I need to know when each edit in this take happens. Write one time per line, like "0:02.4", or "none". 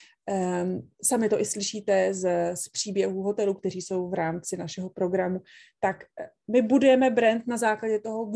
none